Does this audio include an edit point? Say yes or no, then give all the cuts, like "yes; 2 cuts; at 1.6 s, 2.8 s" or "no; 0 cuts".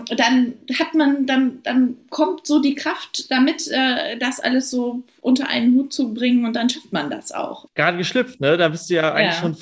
yes; 1 cut; at 7.7 s